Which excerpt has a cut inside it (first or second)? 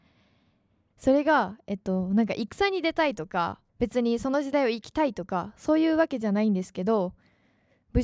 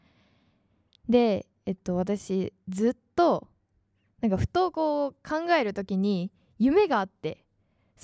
first